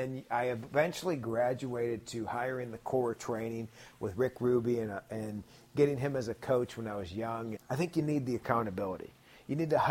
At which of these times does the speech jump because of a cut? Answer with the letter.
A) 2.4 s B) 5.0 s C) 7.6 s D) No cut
C